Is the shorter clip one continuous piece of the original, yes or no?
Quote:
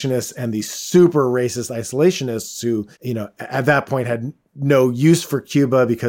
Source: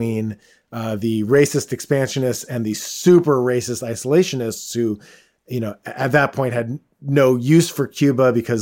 no